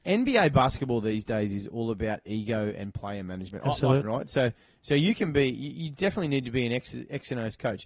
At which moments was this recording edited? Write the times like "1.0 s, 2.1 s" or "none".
4.0 s